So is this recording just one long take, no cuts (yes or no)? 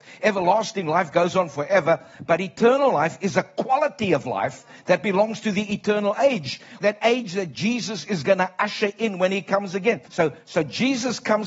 no